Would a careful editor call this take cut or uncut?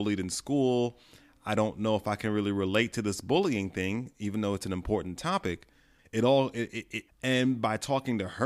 cut